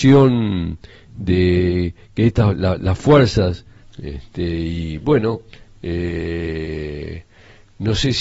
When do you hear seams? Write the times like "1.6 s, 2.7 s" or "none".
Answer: 3.8 s